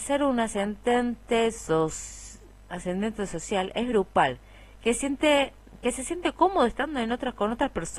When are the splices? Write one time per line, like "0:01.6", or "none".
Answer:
none